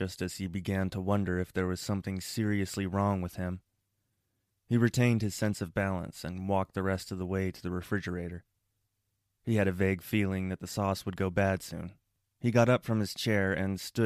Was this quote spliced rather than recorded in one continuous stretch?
yes; 2 cuts; at 9.4 s, 12.2 s

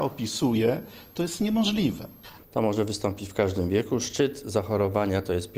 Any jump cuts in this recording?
yes; 1 cut; at 2.4 s

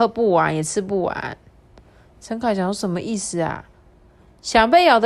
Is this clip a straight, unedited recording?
yes; 0 cuts

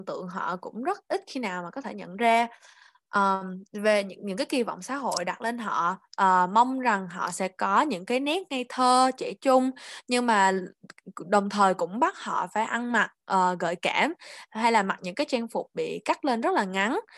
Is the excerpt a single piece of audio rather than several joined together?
yes; 0 cuts

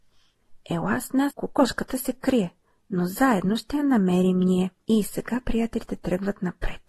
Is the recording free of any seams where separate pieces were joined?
no; 2 cuts; at 1.3 s, 4.8 s

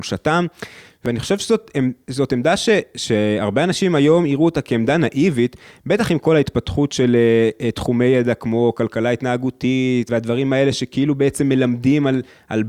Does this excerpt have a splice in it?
no; 0 cuts

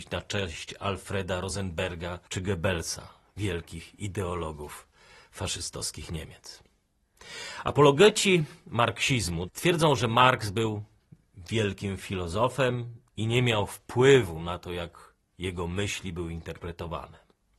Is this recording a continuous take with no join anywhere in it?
no; 2 cuts; at 2.3 s, 9.5 s

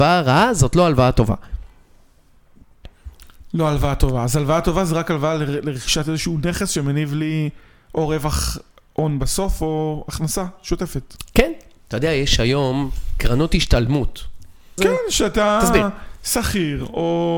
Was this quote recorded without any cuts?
no; 1 cut; at 14.8 s

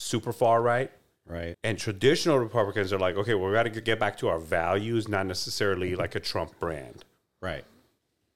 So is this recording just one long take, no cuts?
no; 1 cut; at 1.5 s

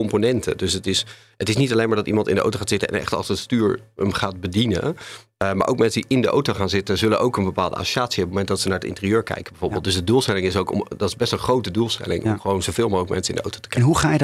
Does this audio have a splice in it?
no; 0 cuts

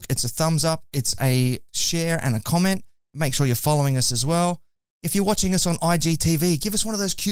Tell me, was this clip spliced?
no; 0 cuts

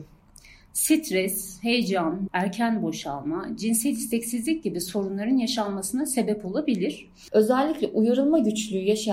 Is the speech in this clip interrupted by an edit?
yes; 2 cuts; at 2.3 s, 7.3 s

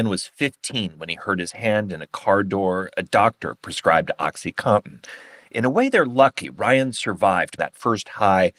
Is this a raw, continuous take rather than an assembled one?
no; 1 cut; at 7.6 s

